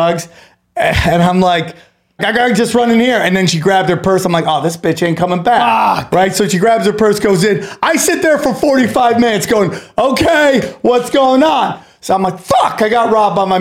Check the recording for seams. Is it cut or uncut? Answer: cut